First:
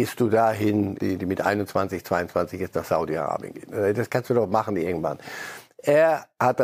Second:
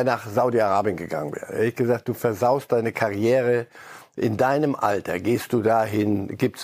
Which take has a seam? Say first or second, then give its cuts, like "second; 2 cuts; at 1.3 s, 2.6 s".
first; 1 cut; at 1.0 s